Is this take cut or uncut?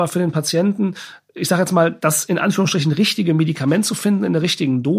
uncut